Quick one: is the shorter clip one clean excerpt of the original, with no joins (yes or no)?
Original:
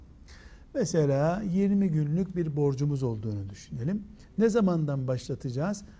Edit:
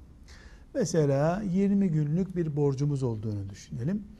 yes